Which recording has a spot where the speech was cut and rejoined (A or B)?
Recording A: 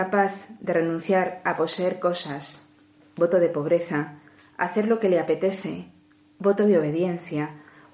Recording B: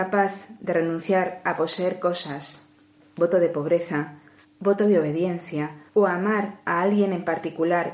B